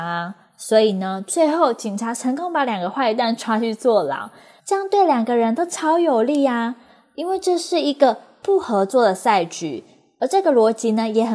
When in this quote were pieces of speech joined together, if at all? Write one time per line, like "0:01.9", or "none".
0:04.6